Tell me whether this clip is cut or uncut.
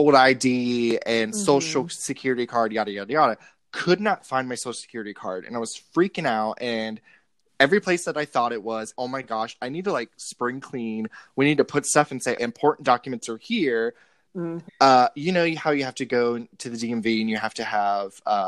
cut